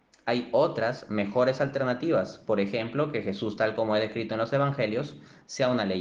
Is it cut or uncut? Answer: uncut